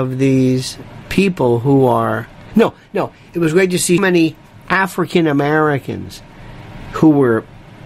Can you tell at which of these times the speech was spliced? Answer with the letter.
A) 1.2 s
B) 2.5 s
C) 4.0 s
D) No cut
C